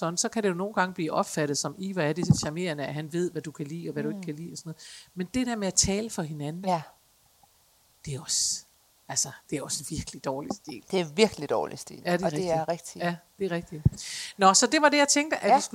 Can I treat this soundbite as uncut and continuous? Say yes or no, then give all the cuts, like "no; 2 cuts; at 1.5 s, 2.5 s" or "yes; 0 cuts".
no; 1 cut; at 9.4 s